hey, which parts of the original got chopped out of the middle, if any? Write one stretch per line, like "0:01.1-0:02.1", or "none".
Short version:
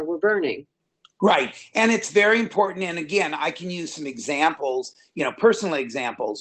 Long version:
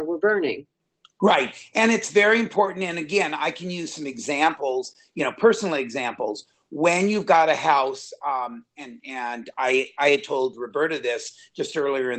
none